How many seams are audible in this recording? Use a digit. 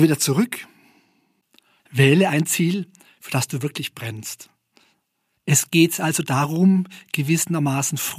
2